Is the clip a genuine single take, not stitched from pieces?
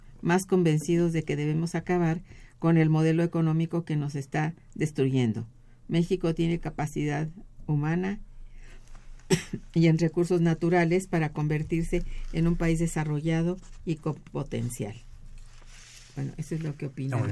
yes; 0 cuts

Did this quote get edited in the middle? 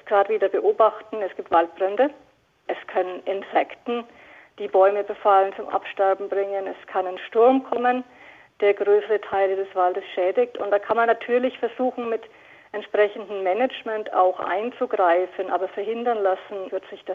no; 0 cuts

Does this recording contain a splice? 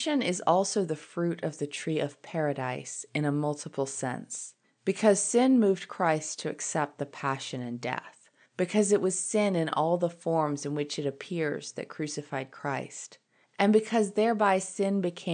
no; 0 cuts

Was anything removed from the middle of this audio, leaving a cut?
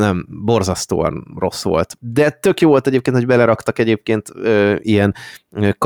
yes; 1 cut; at 2.0 s

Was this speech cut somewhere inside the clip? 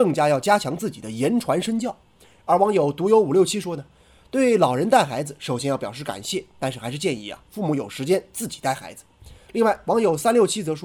no; 0 cuts

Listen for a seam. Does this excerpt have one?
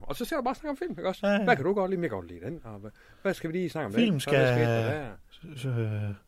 no; 0 cuts

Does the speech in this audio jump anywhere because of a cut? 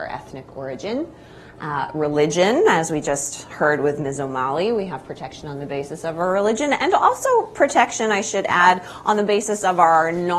no; 0 cuts

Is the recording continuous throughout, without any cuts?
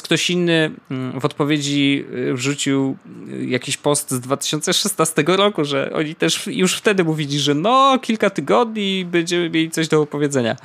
yes; 0 cuts

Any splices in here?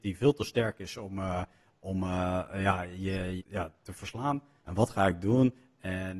yes; 2 cuts; at 3.4 s, 4.6 s

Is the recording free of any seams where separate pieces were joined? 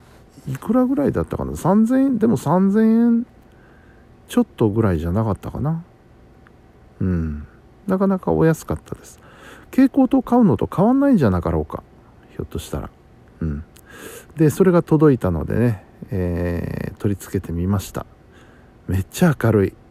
yes; 0 cuts

